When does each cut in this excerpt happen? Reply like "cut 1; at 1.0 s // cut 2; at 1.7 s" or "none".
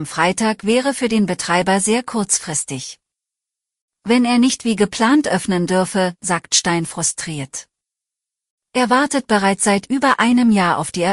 cut 1; at 6.2 s